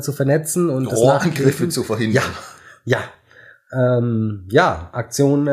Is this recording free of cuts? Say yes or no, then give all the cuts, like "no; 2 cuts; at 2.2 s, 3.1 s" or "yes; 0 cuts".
yes; 0 cuts